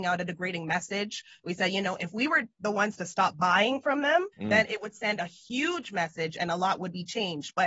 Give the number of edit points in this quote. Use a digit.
1